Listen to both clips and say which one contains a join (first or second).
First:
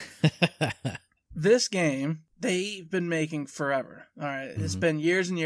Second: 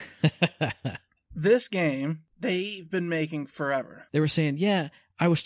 second